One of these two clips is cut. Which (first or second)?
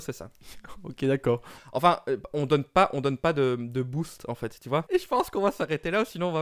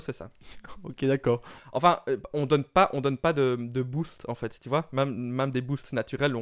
first